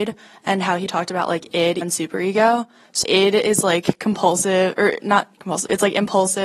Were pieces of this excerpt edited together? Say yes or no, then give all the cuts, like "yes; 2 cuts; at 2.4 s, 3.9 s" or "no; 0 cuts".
yes; 2 cuts; at 1.8 s, 3.0 s